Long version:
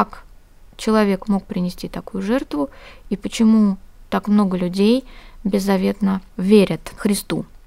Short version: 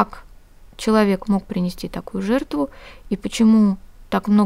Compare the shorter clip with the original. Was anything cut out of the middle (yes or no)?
no